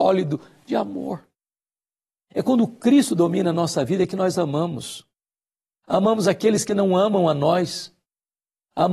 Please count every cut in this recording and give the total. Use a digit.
1